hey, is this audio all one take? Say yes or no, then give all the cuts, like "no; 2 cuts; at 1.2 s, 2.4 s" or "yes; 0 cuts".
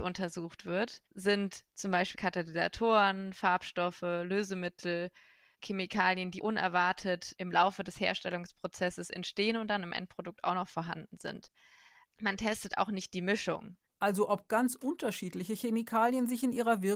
yes; 0 cuts